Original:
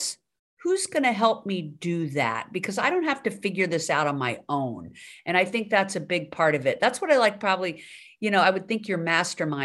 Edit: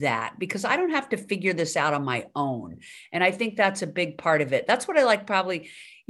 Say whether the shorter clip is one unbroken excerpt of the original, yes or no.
yes